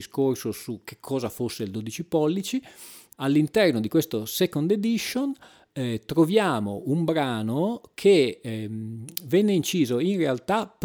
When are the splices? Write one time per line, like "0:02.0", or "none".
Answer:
0:03.1